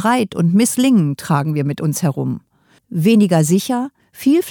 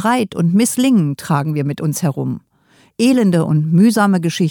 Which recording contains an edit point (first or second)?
first